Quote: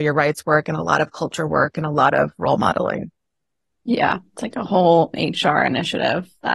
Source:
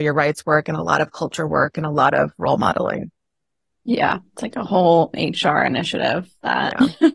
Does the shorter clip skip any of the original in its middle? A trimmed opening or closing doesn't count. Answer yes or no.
no